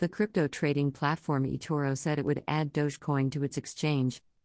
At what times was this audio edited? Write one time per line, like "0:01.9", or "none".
none